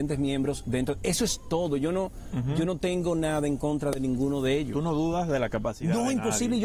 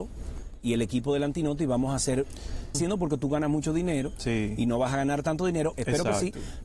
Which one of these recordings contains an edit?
second; 2 cuts; at 2.7 s, 5.7 s

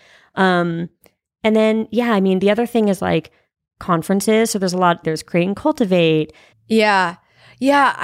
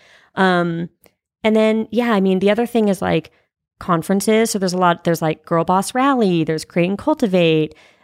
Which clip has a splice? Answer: first; 2 cuts; at 5.0 s, 6.5 s

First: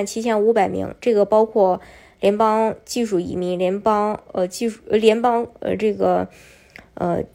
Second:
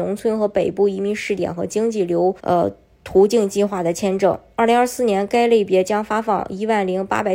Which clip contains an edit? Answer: second; 1 cut; at 2.4 s

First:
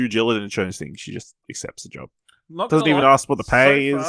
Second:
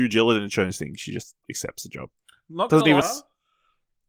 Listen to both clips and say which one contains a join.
second; 1 cut; at 3.0 s

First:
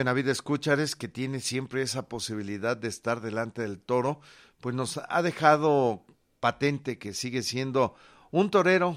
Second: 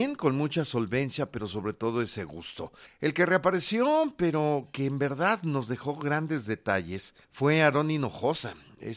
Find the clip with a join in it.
second; 2 cuts; at 2.9 s, 7.2 s

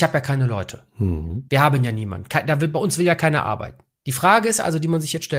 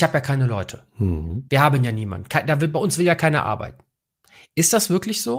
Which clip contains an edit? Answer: first; 1 cut; at 4.0 s

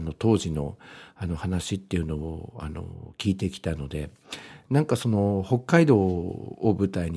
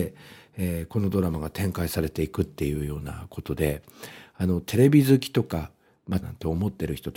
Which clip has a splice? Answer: second; 1 cut; at 6.2 s

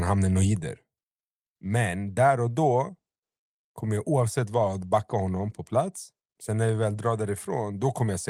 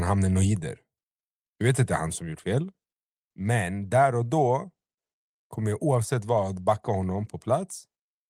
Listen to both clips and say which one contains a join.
first; 2 cuts; at 1.5 s, 6.3 s

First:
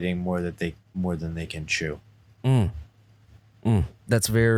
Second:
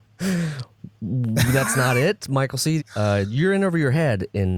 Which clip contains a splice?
second; 1 cut; at 2.8 s

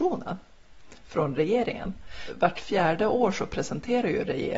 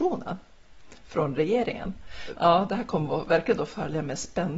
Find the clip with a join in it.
second; 1 cut; at 2.3 s

